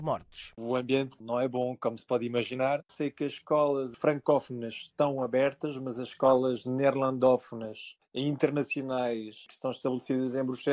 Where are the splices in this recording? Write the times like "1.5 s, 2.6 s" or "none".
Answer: 2.8 s